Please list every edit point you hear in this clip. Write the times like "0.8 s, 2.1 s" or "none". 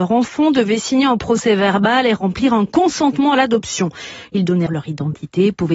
4.7 s